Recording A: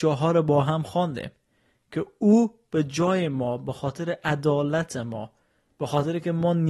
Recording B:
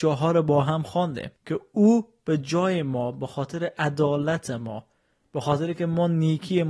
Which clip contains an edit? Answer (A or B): B